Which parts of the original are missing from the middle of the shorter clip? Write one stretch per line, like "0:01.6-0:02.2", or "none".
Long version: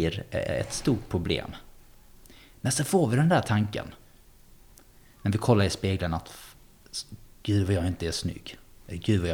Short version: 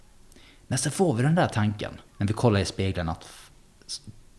0:04.0-0:05.1

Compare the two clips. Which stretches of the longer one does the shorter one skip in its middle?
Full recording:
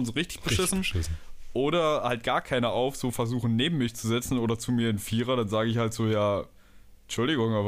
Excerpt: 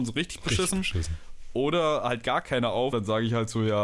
0:02.9-0:05.4

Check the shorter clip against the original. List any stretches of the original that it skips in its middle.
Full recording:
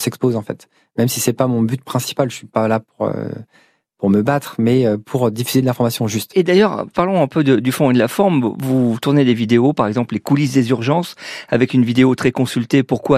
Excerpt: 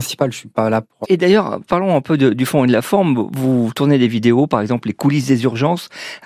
0:03.0-0:06.3

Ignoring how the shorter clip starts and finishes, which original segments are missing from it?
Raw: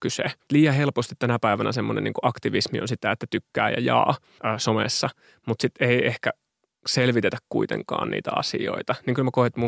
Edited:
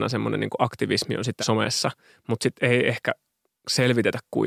0:03.0-0:04.6

